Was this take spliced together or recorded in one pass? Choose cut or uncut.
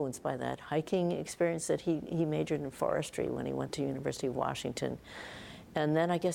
uncut